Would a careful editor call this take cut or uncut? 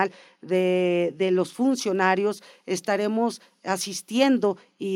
uncut